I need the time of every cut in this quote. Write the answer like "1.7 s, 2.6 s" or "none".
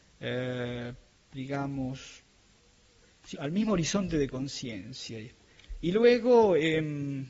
3.3 s